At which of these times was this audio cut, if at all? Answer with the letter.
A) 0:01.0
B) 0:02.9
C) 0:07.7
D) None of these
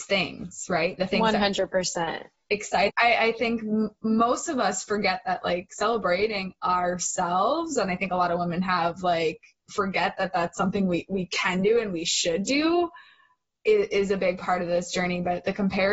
B